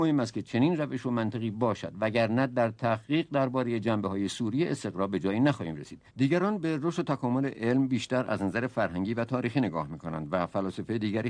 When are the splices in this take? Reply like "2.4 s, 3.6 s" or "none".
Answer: 6.1 s